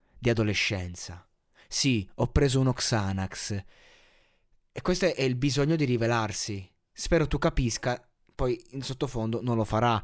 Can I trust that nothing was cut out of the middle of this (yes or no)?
yes